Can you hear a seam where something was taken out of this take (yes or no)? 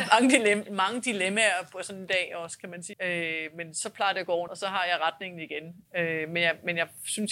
yes